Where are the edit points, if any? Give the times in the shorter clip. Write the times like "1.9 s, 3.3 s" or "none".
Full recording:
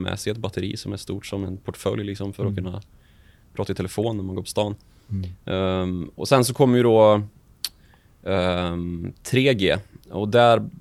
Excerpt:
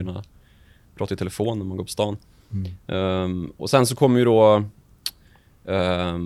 none